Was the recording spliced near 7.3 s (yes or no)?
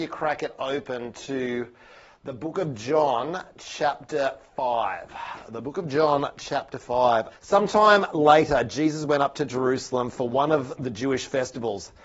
yes